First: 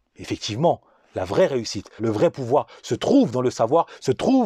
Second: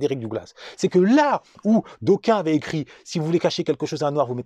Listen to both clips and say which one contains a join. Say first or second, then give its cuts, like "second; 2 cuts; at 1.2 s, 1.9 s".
first; 1 cut; at 2.0 s